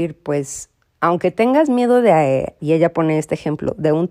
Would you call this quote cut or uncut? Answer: cut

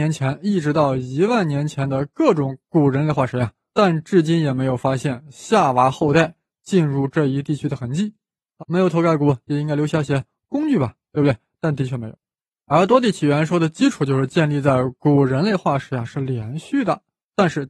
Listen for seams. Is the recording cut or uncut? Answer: cut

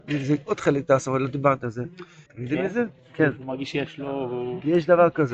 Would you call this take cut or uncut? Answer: cut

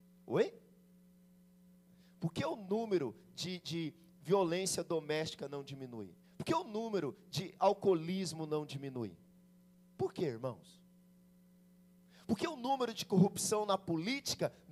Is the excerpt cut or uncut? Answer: uncut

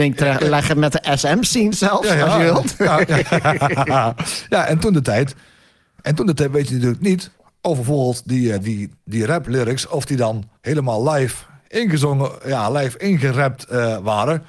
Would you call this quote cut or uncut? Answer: uncut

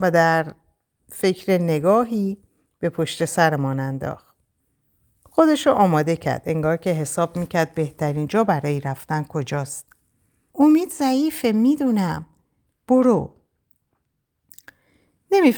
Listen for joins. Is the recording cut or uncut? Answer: cut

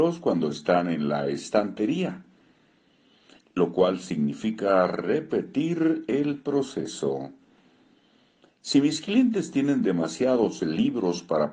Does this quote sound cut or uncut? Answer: uncut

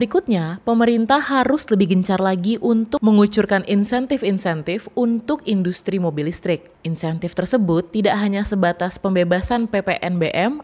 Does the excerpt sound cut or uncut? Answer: uncut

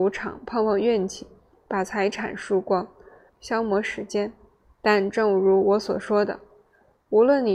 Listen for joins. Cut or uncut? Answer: cut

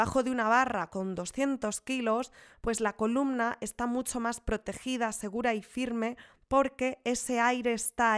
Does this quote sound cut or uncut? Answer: uncut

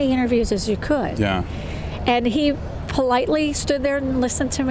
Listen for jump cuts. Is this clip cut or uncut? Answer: uncut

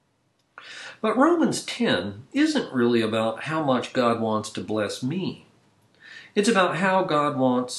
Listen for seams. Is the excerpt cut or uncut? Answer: cut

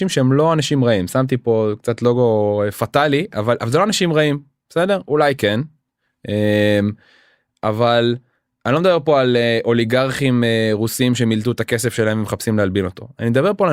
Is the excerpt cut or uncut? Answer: uncut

